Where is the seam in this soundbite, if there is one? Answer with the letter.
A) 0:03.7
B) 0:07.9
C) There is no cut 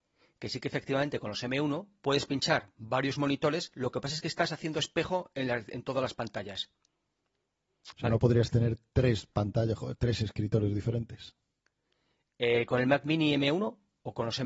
B